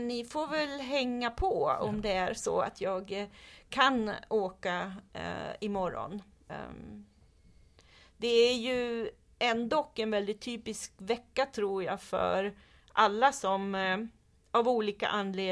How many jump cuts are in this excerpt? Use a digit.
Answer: 1